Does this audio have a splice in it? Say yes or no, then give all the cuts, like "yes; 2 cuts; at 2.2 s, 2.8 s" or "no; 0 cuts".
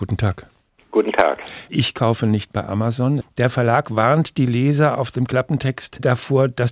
yes; 2 cuts; at 1.7 s, 3.2 s